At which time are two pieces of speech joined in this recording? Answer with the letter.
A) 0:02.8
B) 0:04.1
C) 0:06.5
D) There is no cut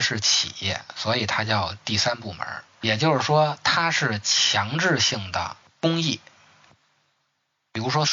A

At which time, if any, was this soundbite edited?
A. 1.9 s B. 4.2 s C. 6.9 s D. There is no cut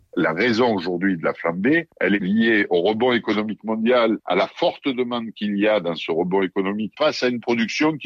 C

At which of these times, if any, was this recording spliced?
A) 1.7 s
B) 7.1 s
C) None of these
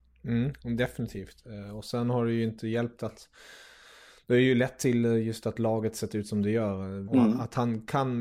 B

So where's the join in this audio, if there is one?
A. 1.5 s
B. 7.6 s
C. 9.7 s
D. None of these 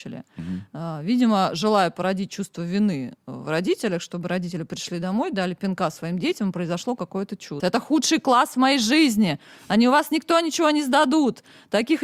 B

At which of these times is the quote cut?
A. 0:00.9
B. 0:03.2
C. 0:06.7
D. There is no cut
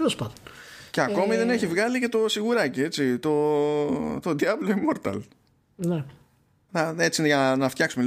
C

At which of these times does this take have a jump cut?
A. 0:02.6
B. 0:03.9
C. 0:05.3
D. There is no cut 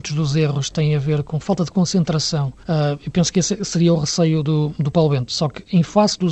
A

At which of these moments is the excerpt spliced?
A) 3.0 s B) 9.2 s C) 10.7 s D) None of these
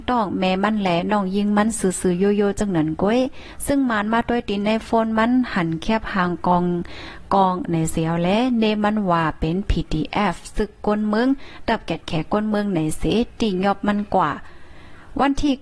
D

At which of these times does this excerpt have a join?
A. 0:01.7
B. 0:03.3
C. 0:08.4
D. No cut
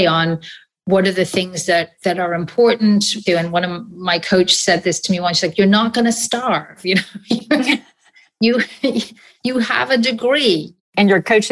B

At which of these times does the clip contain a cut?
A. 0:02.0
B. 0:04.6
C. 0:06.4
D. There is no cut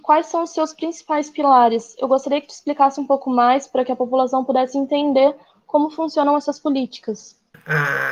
D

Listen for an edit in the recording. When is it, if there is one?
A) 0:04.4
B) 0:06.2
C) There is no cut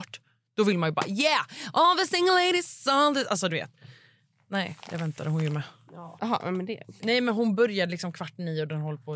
B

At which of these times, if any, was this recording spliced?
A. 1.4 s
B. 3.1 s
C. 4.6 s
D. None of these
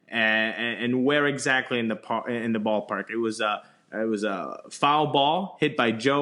D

